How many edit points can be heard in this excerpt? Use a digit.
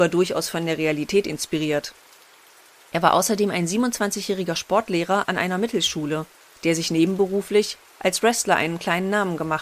0